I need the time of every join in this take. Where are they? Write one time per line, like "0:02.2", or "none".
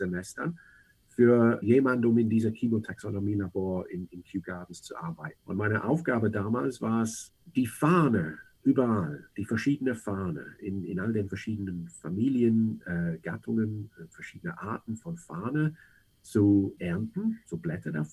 0:05.4